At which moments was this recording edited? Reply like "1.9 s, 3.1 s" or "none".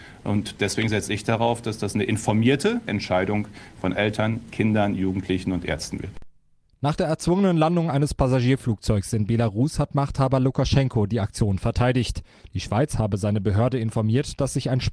none